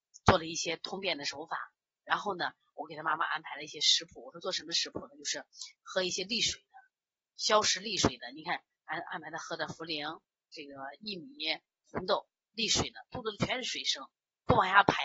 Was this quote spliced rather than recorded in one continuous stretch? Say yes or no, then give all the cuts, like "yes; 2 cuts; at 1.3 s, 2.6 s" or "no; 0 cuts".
no; 0 cuts